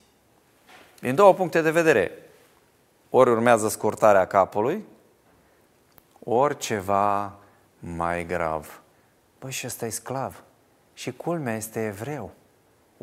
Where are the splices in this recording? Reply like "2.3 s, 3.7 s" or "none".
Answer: 9.2 s